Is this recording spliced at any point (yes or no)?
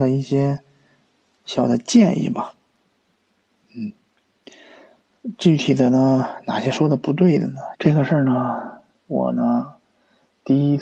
yes